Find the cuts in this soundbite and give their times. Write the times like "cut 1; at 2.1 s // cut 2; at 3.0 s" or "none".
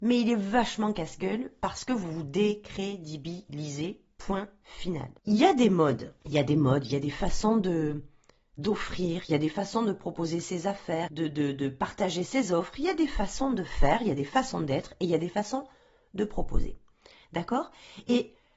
cut 1; at 11.1 s